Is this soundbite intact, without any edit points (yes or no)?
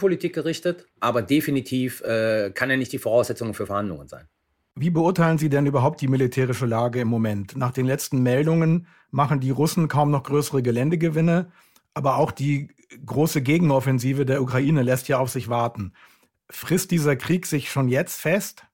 no